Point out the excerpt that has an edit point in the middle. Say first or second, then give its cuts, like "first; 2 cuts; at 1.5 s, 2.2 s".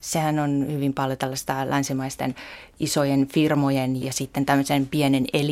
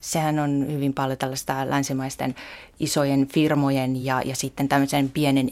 first; 1 cut; at 4.0 s